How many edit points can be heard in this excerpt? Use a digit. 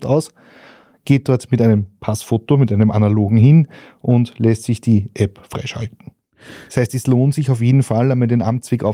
1